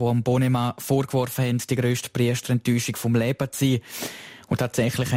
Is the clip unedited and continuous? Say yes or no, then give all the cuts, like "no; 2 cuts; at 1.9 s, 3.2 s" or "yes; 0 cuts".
yes; 0 cuts